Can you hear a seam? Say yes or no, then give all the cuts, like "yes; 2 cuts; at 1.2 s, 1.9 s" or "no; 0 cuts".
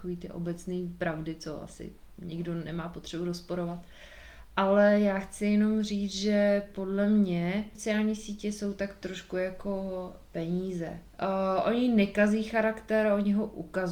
no; 0 cuts